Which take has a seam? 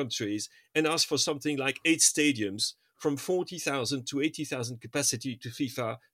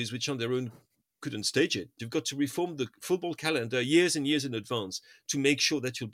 second; 1 cut; at 2.0 s

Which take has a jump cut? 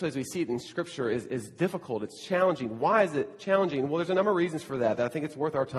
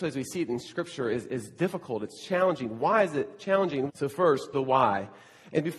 second; 1 cut; at 3.9 s

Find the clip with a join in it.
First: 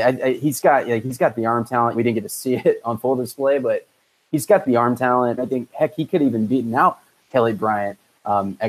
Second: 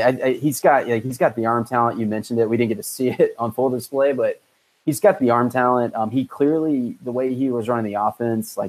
first; 2 cuts; at 1.9 s, 5.4 s

